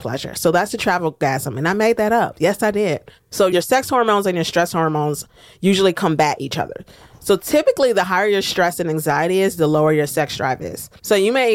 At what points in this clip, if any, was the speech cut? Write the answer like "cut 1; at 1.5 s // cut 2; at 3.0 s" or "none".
cut 1; at 3.2 s